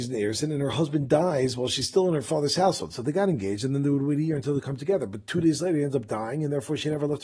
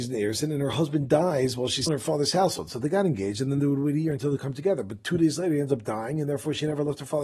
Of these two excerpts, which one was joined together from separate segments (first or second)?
second